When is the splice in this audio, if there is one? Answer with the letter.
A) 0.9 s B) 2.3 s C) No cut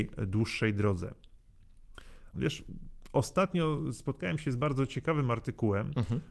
B